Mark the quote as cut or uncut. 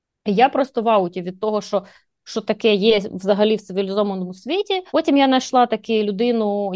cut